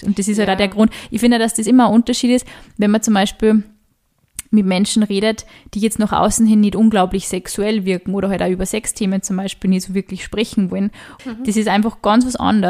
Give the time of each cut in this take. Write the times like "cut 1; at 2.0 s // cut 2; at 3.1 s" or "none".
cut 1; at 11.2 s